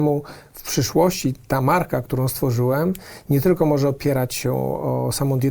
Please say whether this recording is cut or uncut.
uncut